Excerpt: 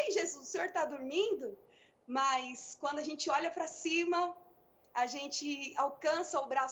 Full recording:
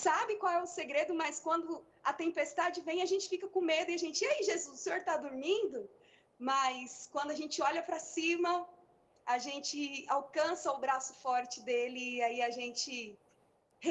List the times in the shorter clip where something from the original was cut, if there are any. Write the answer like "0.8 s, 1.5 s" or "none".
none